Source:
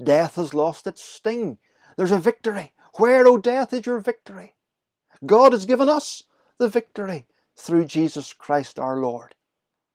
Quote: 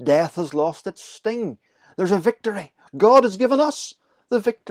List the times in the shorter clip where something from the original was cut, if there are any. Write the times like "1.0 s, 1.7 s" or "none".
2.9 s